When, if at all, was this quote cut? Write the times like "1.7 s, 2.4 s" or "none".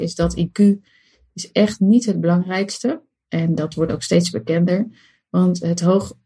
none